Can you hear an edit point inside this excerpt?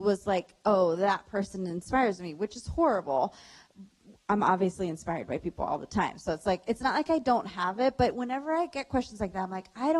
no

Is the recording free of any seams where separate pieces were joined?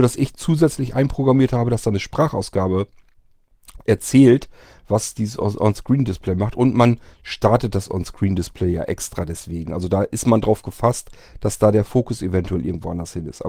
yes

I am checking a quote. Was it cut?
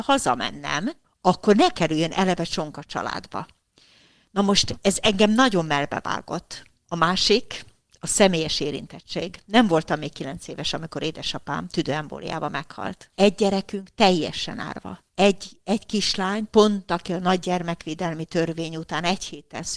yes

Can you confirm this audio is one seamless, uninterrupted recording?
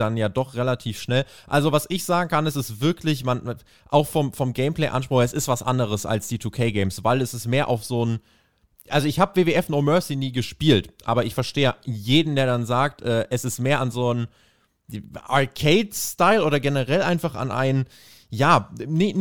yes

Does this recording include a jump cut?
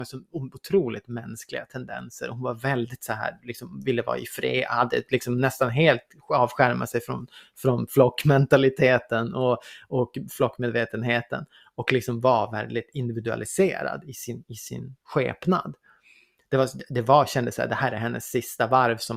no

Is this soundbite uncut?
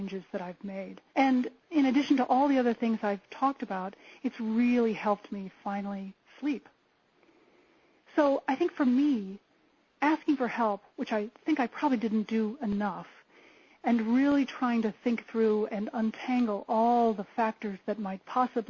no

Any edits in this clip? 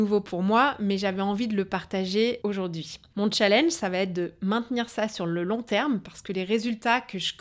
no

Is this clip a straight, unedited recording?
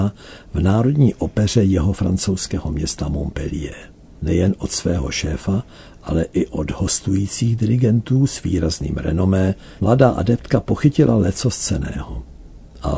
no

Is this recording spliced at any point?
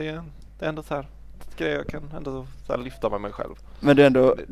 no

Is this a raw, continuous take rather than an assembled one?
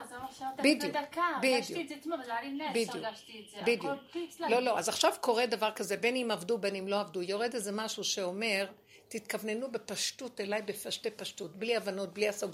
yes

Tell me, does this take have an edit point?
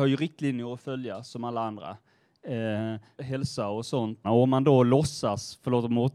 yes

